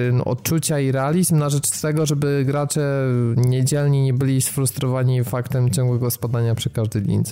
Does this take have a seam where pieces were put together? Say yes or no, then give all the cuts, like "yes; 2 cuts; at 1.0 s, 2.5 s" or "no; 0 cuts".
no; 0 cuts